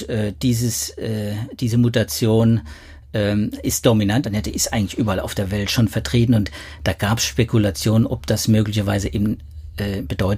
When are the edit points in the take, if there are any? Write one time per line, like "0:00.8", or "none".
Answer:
0:04.2